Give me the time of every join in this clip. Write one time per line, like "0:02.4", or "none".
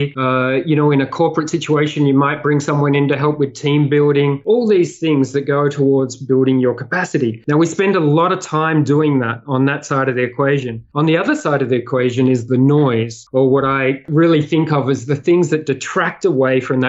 none